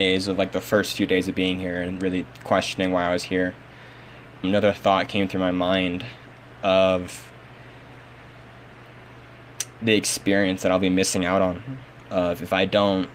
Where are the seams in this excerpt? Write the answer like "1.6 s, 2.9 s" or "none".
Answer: 4.4 s